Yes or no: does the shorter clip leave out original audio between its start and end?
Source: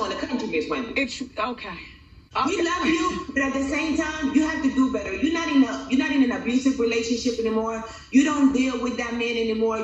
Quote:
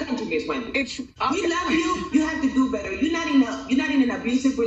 yes